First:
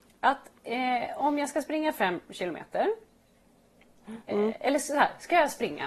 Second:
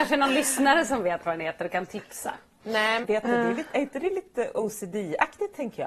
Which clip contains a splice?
second; 1 cut; at 3.0 s

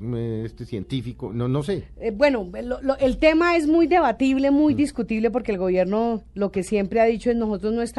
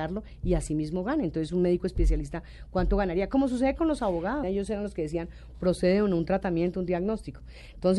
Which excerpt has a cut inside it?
second; 2 cuts; at 4.4 s, 6.7 s

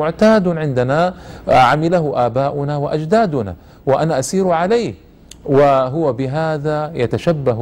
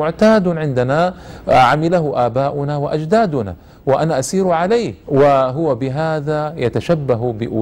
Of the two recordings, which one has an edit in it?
second; 1 cut; at 5.0 s

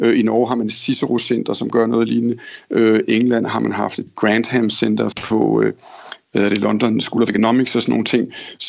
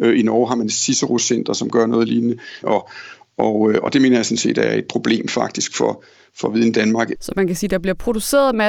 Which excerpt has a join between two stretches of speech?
second; 2 cuts; at 2.6 s, 7.1 s

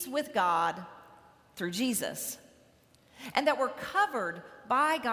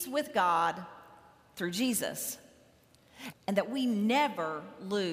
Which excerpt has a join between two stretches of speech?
second; 1 cut; at 3.3 s

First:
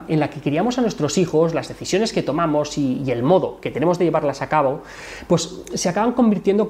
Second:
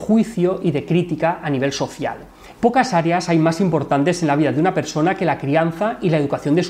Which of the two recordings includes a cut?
second; 1 cut; at 2.5 s

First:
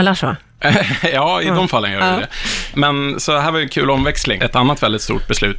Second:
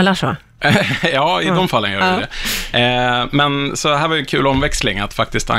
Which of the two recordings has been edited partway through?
first; 2 cuts; at 2.7 s, 4.4 s

